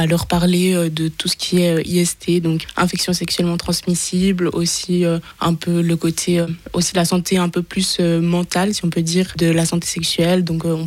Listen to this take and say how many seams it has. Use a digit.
0